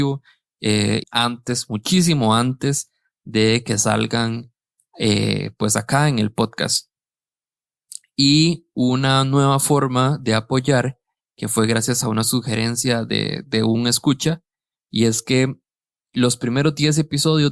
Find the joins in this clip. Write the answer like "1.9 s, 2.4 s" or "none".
1.0 s

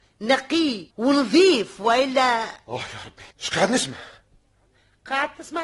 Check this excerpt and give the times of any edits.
0.9 s, 3.3 s

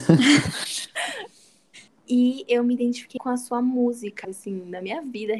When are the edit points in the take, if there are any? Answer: 1.9 s, 3.2 s, 4.2 s

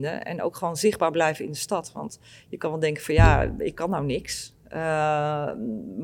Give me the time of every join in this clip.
none

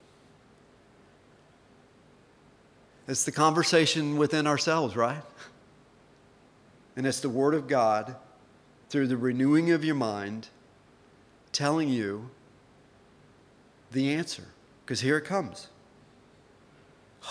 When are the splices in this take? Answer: none

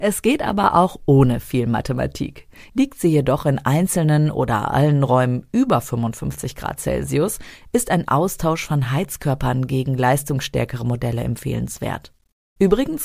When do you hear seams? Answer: 2.7 s

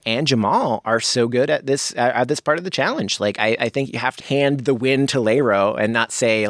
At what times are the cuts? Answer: 4.2 s

